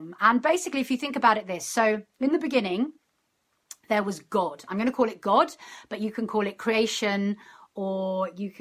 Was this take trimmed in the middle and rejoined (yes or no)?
no